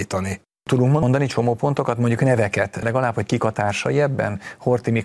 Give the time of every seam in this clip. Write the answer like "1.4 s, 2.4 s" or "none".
none